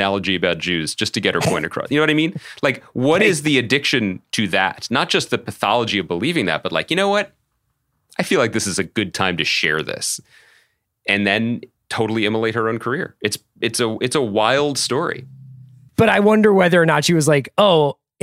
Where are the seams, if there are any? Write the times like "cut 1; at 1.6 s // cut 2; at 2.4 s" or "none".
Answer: cut 1; at 15.9 s